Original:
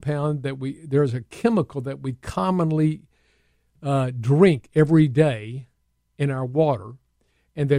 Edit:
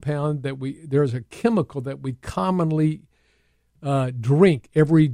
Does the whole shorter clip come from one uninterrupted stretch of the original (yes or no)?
yes